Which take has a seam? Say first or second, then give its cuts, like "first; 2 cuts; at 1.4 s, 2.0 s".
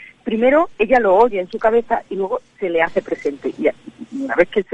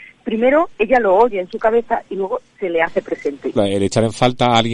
second; 1 cut; at 3.6 s